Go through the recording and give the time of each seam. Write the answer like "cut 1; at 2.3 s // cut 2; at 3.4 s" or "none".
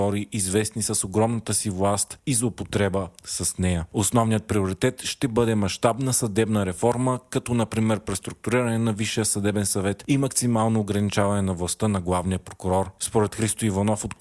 cut 1; at 3.9 s